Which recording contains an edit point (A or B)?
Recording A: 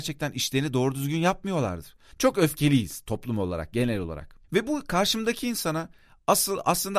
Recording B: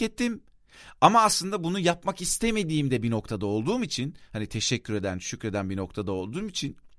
A